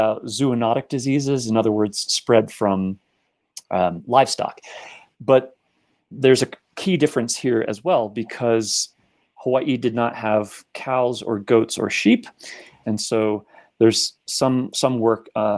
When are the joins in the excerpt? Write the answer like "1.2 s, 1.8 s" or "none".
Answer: 2.1 s, 12.8 s